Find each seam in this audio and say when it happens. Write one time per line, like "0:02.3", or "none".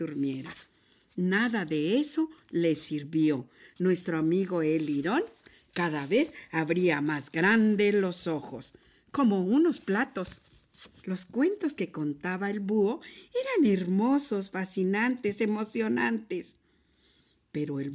0:11.0